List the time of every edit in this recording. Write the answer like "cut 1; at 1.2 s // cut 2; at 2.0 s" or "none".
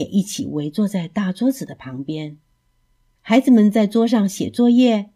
cut 1; at 3.2 s